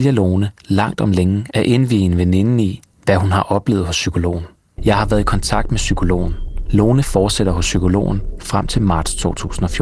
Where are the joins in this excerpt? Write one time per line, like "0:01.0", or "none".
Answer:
0:04.8
0:06.7